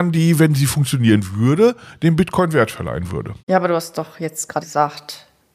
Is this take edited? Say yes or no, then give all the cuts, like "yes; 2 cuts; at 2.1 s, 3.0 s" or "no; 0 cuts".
yes; 2 cuts; at 3.4 s, 4.6 s